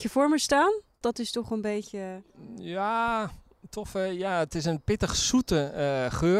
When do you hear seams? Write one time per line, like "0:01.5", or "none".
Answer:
0:01.0